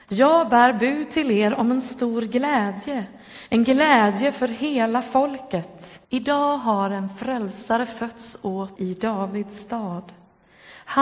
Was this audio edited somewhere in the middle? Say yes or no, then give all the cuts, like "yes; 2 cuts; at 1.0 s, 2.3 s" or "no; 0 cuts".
yes; 2 cuts; at 6.0 s, 8.8 s